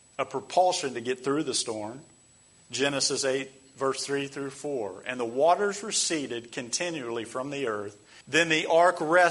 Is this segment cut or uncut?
cut